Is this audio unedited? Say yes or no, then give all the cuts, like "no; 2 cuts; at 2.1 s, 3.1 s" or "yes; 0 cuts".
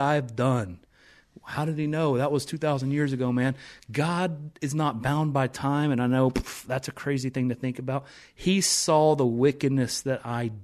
yes; 0 cuts